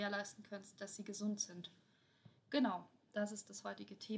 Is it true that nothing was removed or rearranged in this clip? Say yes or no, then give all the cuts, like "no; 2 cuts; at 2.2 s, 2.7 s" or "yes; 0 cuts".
yes; 0 cuts